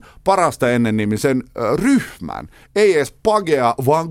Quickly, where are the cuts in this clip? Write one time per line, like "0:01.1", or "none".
none